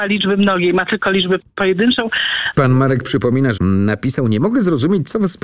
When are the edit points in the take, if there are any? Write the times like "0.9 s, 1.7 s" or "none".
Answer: 2.5 s, 3.5 s

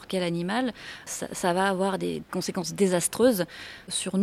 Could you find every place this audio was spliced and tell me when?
1.1 s, 2.2 s

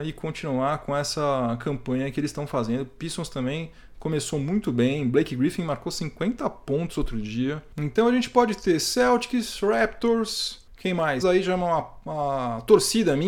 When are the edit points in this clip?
11.2 s

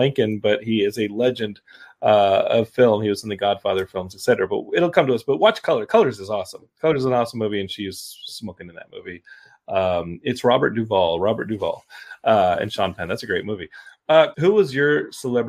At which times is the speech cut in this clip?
14.3 s

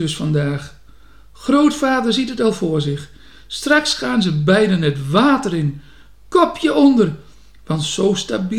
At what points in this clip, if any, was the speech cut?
none

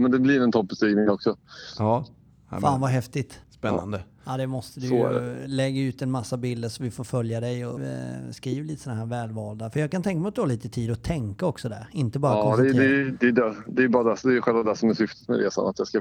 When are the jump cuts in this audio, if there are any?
3.4 s, 7.8 s

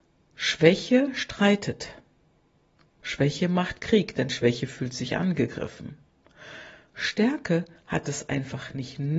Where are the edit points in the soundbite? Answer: none

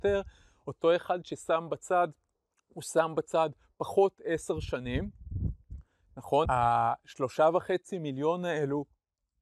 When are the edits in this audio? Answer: 6.5 s

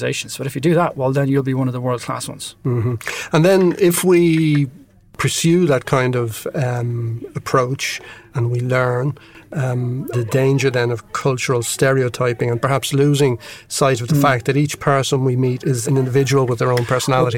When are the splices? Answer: 8.3 s, 10.1 s, 15.8 s

